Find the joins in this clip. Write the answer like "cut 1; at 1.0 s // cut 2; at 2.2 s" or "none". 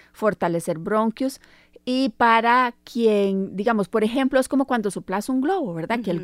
none